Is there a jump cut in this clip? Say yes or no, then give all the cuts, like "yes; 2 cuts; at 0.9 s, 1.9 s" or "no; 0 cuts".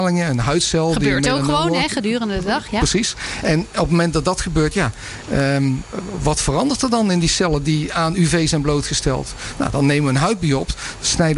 no; 0 cuts